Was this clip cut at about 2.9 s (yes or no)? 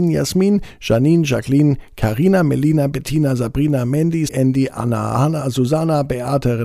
no